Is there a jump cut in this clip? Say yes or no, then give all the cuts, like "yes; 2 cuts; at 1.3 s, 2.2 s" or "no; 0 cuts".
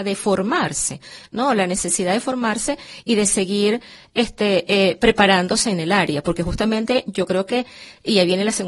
no; 0 cuts